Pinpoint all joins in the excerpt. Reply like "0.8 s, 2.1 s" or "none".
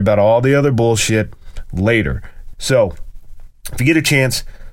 2.5 s